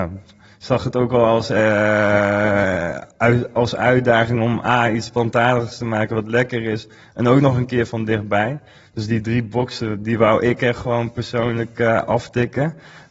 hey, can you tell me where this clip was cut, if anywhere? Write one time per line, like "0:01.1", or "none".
none